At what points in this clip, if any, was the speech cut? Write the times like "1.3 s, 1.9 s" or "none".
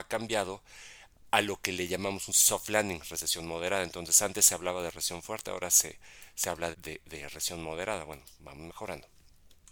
6.7 s